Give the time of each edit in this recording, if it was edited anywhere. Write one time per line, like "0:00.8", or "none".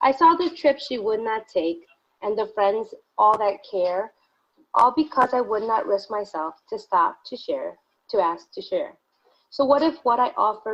none